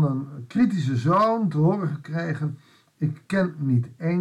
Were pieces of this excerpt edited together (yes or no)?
no